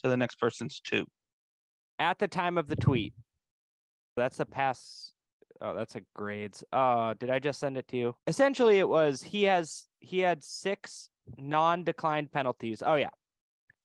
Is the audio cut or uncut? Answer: cut